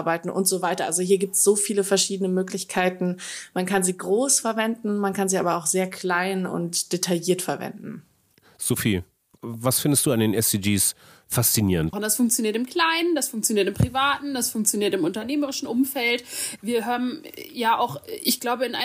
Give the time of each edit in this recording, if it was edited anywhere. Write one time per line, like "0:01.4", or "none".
0:11.9